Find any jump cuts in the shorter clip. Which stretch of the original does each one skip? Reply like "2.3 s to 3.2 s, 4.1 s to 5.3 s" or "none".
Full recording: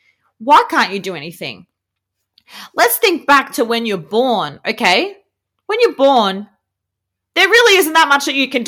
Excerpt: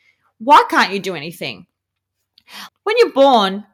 2.7 s to 5.5 s